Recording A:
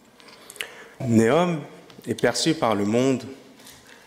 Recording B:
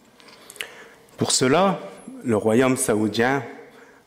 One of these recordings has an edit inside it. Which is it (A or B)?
A